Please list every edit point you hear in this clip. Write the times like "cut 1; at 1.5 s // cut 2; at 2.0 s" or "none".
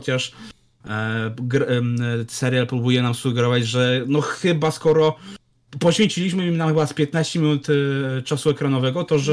none